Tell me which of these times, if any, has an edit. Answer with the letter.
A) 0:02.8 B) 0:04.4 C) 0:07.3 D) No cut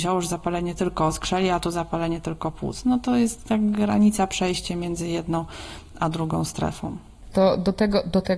C